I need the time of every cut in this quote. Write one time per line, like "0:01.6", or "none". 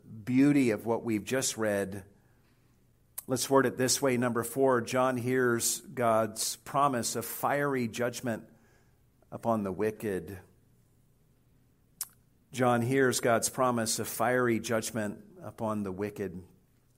none